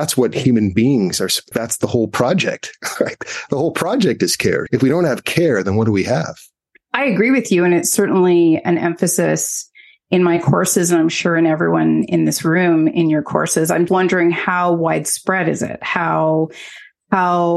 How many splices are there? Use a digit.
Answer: 3